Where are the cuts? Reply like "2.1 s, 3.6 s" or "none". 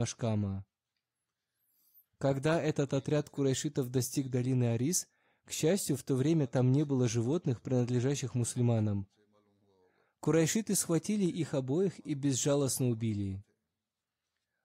10.1 s